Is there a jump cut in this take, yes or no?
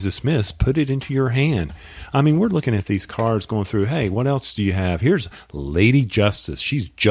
no